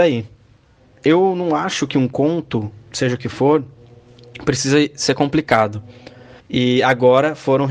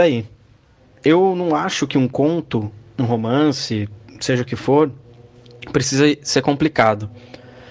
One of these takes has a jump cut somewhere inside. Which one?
first; 2 cuts; at 2.9 s, 6.4 s

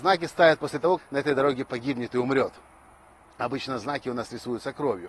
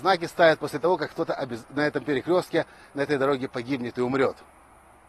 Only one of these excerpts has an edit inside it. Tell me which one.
first; 1 cut; at 1.0 s

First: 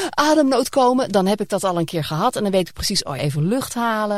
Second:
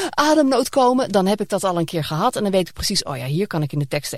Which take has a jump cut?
first; 1 cut; at 3.2 s

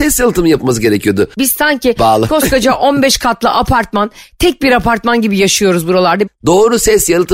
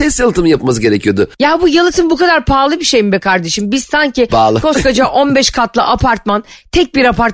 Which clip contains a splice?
first; 2 cuts; at 1.4 s, 6.3 s

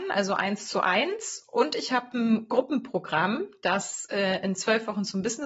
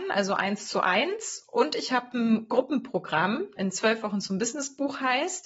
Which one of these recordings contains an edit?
second; 1 cut; at 3.6 s

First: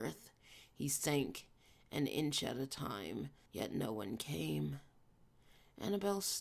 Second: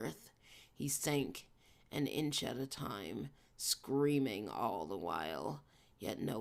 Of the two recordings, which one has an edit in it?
first; 1 cut; at 3.5 s

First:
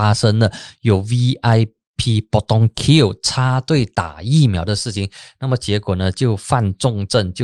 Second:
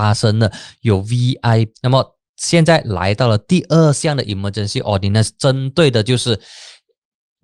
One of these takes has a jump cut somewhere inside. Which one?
second; 1 cut; at 1.7 s

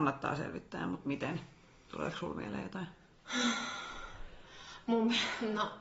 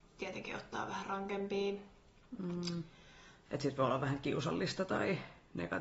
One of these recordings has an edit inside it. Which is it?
second; 1 cut; at 3.5 s

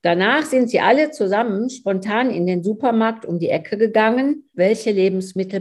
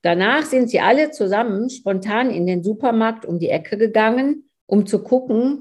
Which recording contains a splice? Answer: first; 1 cut; at 4.5 s

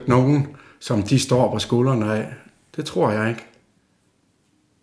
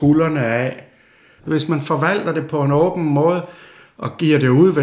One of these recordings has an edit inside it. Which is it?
second; 1 cut; at 1.4 s

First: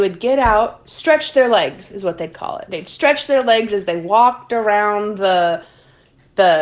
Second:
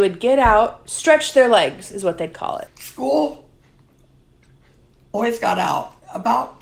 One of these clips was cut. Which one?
second; 1 cut; at 2.7 s

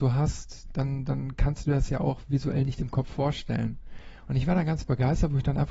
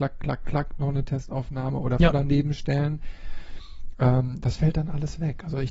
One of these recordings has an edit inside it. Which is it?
second; 1 cut; at 2.1 s

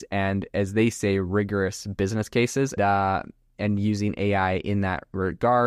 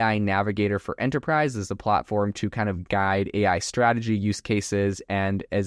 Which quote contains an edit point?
first; 1 cut; at 2.8 s

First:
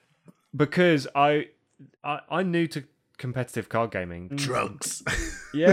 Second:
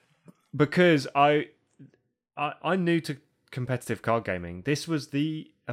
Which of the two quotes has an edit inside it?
first; 2 cuts; at 1.9 s, 4.3 s

